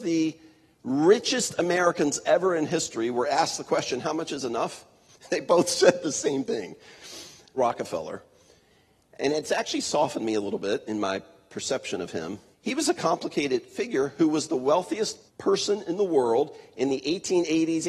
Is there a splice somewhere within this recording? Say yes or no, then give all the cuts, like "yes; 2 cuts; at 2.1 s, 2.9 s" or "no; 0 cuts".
yes; 3 cuts; at 7.6 s, 12.5 s, 15.3 s